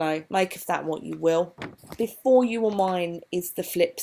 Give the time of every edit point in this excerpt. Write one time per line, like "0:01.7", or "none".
none